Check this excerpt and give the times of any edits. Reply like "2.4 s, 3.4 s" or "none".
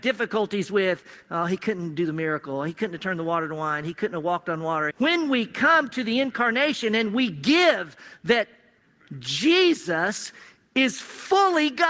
4.9 s